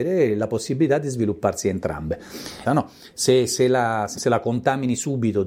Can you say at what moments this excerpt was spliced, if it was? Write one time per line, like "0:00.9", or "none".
0:02.6
0:04.1